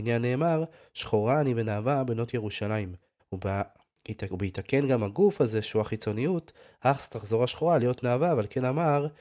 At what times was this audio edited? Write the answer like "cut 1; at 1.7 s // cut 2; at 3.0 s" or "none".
cut 1; at 3.2 s